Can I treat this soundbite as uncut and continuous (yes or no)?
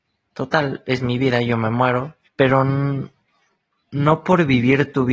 no